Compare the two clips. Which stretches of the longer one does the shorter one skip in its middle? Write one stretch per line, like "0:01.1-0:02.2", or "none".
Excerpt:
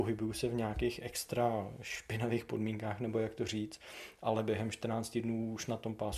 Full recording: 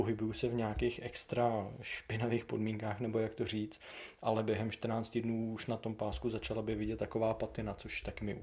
none